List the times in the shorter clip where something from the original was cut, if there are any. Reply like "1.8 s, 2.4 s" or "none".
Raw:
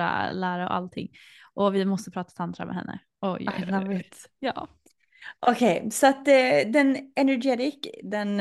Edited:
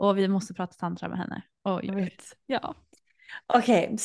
1.9 s